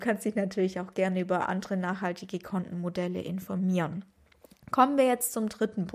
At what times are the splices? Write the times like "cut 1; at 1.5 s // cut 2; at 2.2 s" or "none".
none